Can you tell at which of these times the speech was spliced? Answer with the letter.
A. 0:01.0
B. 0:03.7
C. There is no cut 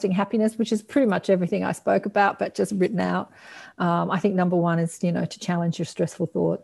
C